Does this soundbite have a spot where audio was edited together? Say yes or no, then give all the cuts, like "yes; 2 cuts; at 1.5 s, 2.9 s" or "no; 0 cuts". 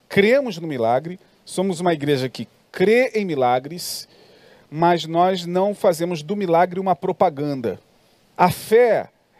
yes; 1 cut; at 8.3 s